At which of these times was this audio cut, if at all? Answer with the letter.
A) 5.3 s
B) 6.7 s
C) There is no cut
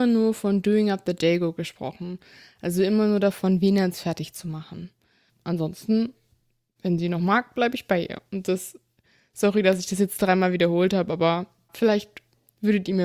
A